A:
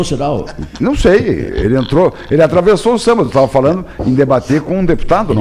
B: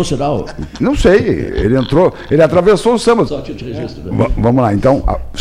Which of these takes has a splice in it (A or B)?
B